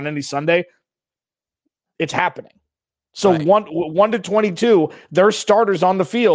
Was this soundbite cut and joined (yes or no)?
no